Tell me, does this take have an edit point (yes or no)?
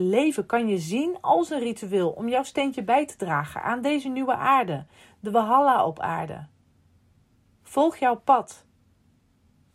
no